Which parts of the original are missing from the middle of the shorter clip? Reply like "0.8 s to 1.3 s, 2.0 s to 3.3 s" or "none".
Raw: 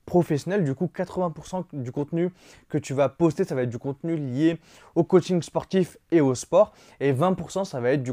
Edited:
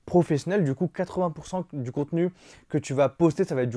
none